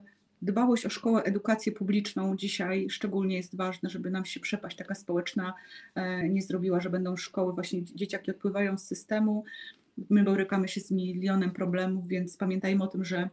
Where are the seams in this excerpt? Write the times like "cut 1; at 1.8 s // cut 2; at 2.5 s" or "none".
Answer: cut 1; at 6.2 s